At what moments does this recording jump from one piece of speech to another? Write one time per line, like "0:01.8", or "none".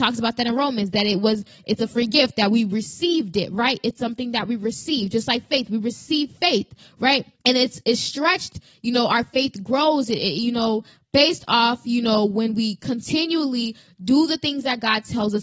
none